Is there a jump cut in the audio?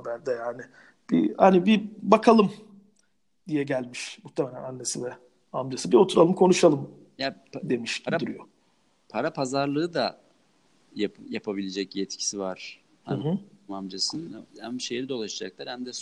yes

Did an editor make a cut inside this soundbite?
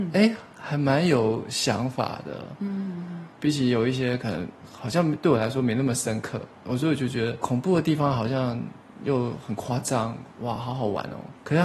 no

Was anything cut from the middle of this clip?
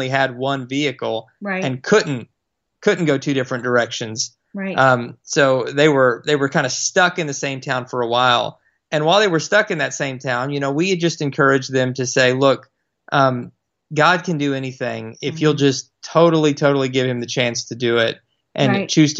no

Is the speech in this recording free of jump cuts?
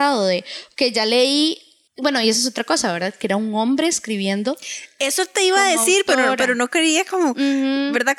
yes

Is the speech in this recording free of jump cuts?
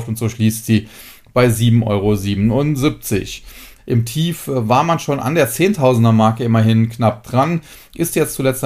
no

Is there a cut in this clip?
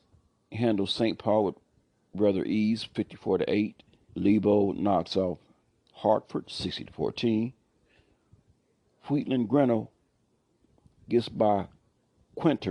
yes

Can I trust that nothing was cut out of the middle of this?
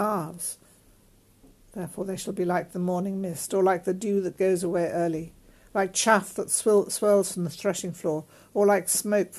yes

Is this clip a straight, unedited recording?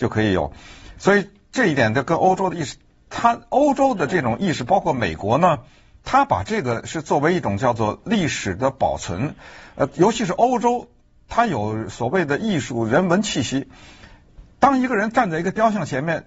yes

